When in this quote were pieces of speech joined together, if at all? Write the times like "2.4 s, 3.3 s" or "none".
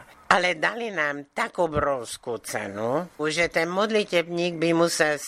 3.2 s